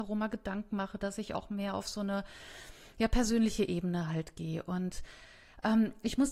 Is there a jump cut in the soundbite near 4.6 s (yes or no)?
no